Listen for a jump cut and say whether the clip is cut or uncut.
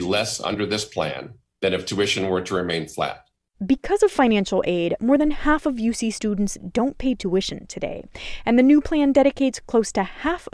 cut